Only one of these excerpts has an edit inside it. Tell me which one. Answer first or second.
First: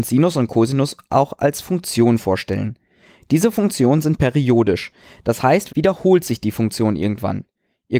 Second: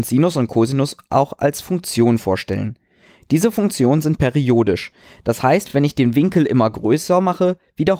first